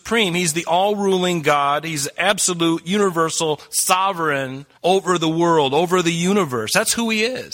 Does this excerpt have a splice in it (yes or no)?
yes